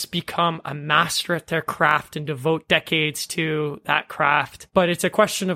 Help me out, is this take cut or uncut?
uncut